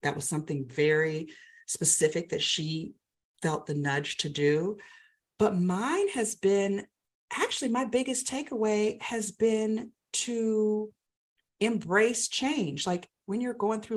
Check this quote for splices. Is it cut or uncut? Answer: uncut